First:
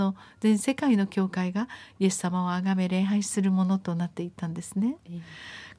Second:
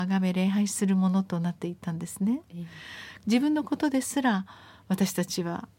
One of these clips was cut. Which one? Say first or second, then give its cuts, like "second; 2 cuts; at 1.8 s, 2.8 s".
second; 1 cut; at 3.2 s